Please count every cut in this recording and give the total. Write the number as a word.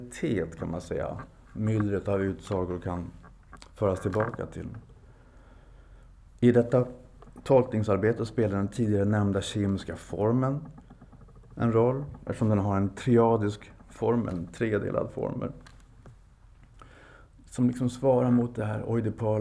zero